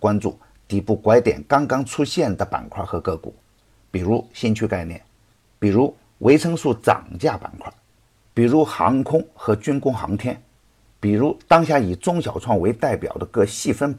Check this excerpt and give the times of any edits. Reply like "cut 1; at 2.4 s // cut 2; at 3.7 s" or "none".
none